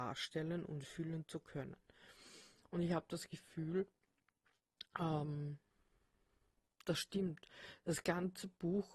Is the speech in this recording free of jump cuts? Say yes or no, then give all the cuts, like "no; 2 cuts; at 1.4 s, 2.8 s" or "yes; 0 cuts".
yes; 0 cuts